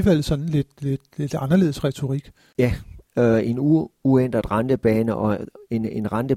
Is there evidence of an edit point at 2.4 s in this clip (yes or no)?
no